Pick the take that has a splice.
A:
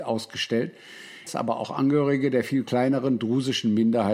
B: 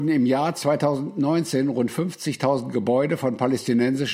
A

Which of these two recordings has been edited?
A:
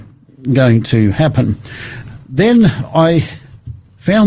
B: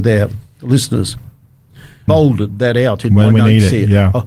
B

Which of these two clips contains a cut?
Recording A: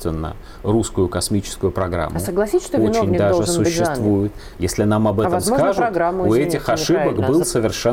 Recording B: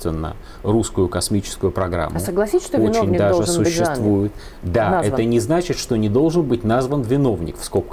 A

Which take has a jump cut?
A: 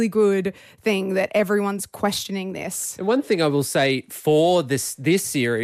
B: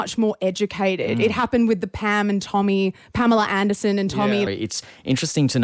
B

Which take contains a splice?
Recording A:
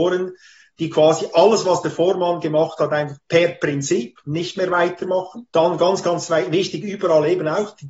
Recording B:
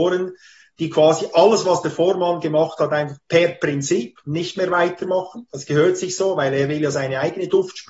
A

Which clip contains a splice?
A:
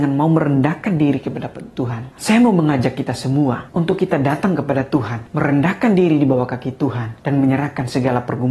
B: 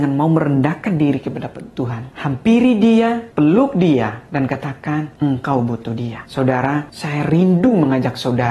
B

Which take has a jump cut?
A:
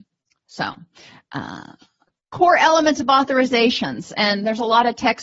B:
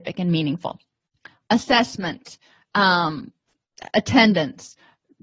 B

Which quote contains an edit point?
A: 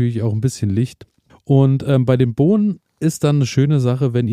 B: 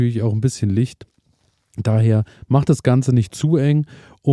A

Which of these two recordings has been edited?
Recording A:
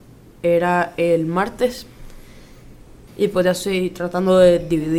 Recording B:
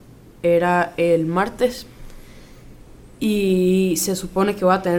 A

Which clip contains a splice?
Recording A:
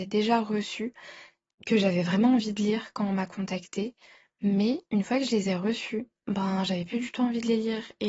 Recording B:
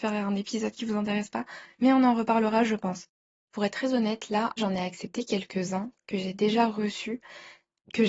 B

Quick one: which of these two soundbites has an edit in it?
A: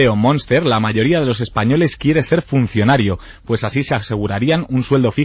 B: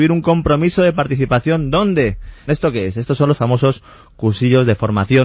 B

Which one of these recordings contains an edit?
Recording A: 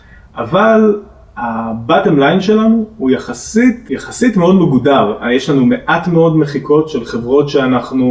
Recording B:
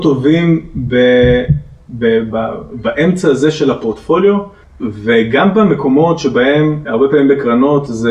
B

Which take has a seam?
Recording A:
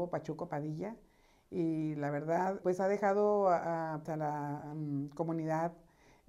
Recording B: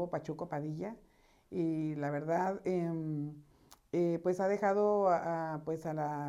A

